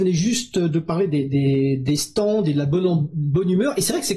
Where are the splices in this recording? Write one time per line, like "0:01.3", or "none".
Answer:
none